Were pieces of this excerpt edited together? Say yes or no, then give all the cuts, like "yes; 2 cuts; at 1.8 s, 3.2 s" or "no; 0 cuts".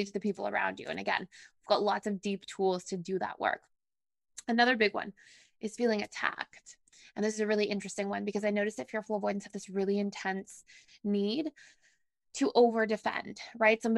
no; 0 cuts